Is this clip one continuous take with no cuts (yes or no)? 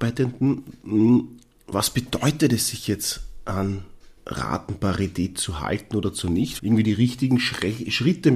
no